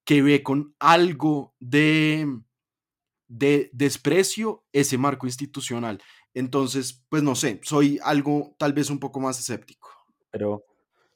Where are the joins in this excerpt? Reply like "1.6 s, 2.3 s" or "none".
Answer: 6.3 s